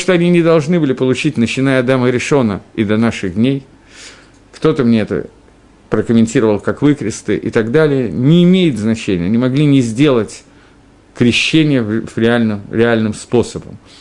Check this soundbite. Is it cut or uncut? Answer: uncut